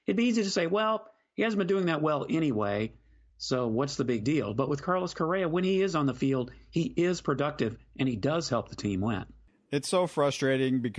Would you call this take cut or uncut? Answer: uncut